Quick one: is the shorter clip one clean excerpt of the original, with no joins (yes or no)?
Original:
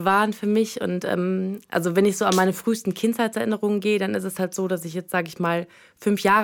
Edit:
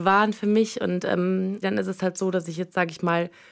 no